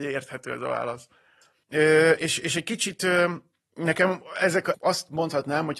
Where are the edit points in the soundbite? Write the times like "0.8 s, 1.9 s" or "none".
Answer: 1.6 s, 4.7 s